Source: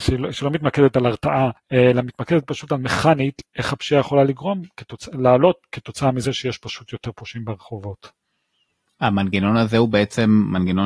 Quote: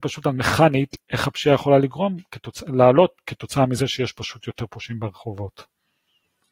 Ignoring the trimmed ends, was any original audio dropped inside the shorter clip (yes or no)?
no